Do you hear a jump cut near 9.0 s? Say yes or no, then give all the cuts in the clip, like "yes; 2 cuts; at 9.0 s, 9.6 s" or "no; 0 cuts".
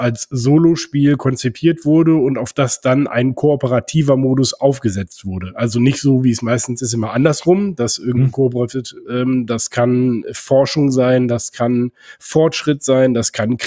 yes; 1 cut; at 9.0 s